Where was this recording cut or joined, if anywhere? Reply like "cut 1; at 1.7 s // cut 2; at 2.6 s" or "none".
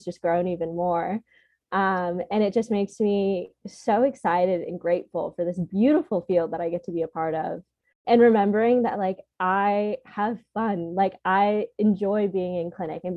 none